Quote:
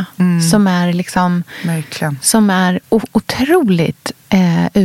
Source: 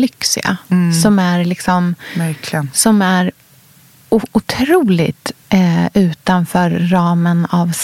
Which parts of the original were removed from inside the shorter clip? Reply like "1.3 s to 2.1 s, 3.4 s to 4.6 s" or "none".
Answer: 3.4 s to 4.0 s